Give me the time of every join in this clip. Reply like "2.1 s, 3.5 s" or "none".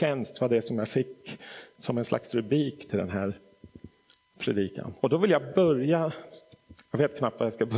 1.7 s, 5.0 s